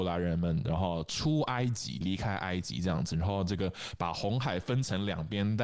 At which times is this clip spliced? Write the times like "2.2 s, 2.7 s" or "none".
2.0 s